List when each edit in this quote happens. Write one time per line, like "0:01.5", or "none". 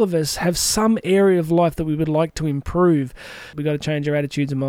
0:03.5

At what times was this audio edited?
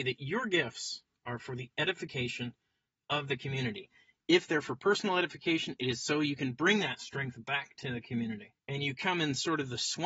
0:08.6

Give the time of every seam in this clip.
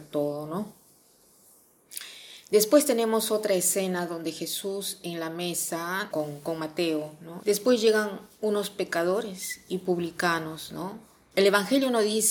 0:06.1
0:07.4
0:11.3

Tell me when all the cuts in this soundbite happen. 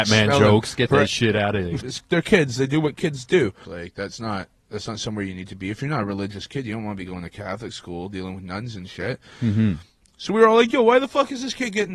0:01.8
0:03.6

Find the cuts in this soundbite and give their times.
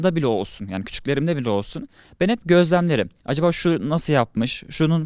0:03.2

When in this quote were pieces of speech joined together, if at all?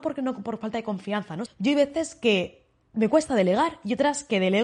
0:01.5

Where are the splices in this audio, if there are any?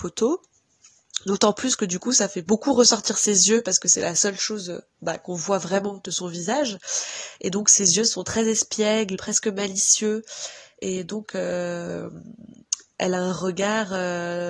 0:09.2

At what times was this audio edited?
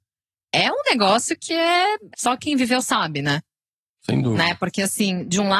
0:02.1
0:04.0

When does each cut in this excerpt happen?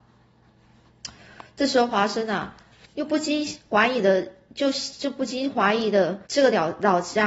0:06.3

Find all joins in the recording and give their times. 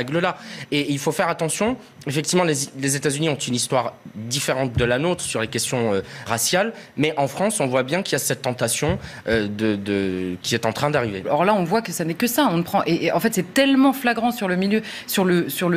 0:06.3
0:11.2

